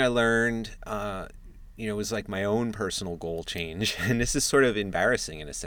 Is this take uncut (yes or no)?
yes